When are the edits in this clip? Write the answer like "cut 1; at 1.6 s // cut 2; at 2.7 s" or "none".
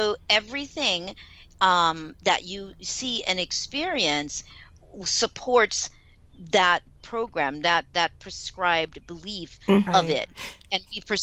cut 1; at 9.9 s